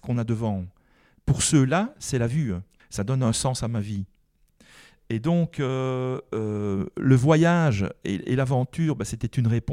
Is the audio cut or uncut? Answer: cut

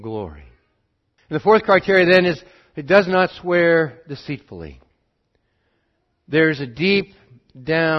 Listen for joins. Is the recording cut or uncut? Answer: cut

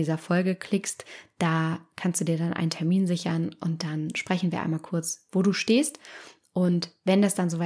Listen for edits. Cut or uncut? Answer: uncut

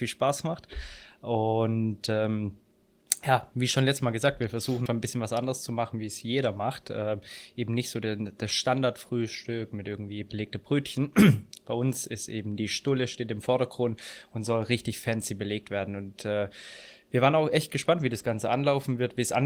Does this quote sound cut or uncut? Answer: cut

